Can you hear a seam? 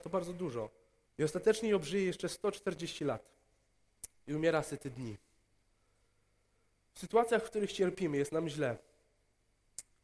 yes; 1 cut; at 1.0 s

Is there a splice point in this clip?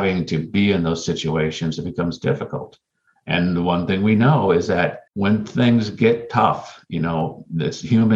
yes; 1 cut; at 5.1 s

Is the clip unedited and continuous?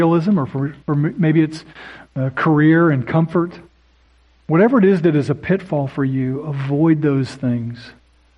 yes; 0 cuts

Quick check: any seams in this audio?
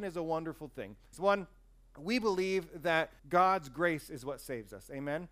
yes; 2 cuts; at 1.1 s, 3.2 s

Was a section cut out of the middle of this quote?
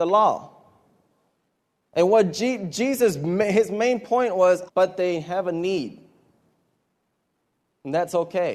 yes; 1 cut; at 4.7 s

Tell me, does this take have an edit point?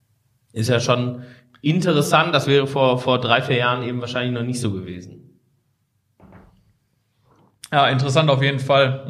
no; 0 cuts

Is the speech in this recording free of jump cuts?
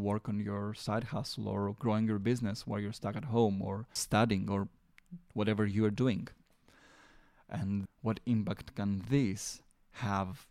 no; 2 cuts; at 4.0 s, 7.9 s

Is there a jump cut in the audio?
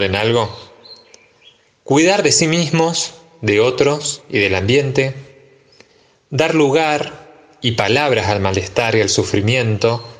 no; 0 cuts

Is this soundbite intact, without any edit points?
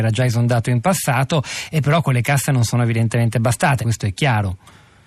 no; 1 cut; at 3.8 s

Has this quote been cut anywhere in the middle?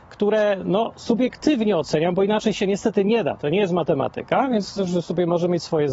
no; 0 cuts

